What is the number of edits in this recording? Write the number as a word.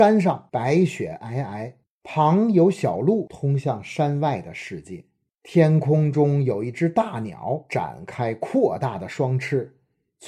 one